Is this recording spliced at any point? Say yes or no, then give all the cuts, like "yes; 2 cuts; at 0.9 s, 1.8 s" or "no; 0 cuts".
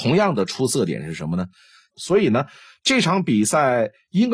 yes; 1 cut; at 1.9 s